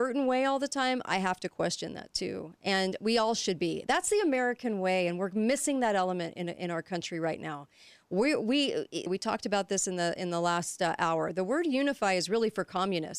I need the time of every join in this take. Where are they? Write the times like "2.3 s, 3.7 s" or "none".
9.1 s